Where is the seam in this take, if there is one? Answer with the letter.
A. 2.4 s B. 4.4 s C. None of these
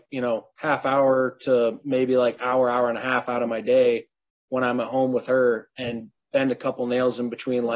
C